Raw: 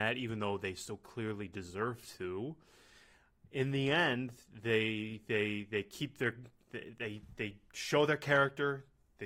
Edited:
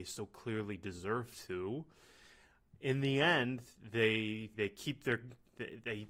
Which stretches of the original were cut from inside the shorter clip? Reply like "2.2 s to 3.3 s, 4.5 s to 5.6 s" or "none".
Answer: 5.2 s to 5.7 s